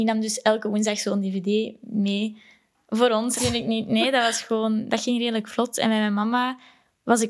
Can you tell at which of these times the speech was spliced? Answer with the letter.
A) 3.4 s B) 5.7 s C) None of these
A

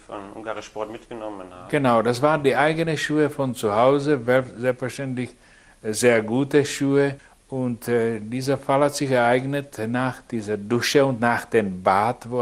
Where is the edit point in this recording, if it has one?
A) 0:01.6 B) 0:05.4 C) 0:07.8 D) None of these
D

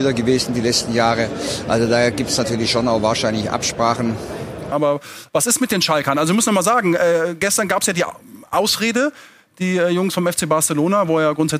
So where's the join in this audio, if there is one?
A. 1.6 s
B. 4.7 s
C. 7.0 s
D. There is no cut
B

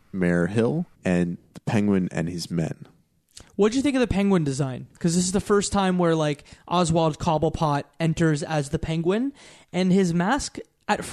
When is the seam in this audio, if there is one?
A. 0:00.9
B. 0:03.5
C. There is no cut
A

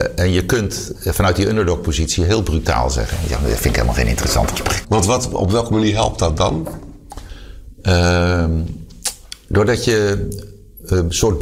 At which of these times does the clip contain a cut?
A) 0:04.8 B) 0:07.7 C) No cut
A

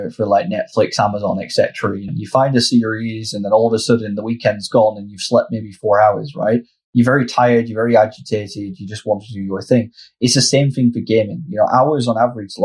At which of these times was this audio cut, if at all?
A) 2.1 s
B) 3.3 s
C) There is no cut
A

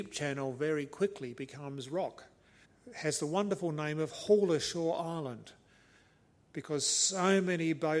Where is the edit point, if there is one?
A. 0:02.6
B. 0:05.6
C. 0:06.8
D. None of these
A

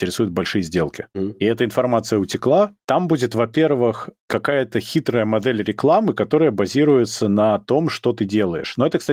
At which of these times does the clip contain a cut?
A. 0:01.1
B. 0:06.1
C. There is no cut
A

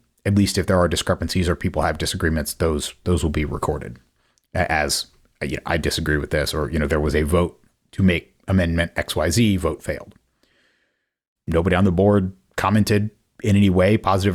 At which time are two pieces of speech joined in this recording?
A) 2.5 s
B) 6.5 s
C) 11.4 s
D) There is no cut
C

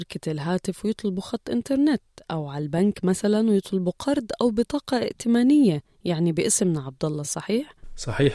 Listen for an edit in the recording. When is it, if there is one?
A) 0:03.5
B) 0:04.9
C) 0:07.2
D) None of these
D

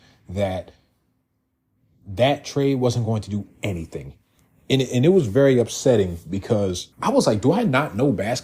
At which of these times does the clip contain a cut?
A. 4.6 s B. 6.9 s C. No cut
B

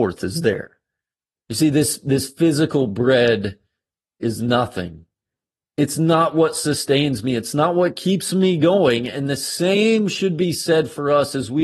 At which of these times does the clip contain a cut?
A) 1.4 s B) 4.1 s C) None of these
A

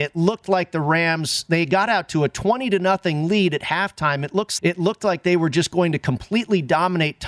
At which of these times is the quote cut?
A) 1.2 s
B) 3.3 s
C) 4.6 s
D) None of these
C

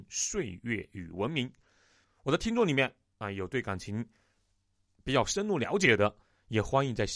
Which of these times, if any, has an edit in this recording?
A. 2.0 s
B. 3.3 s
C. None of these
A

